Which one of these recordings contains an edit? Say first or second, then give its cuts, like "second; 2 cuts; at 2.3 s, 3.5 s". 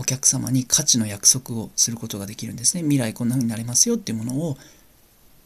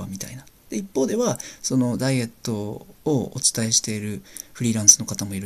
second; 1 cut; at 3.0 s